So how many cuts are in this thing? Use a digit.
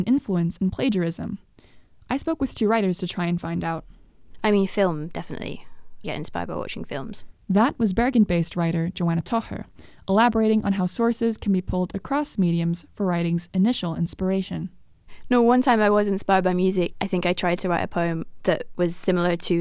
1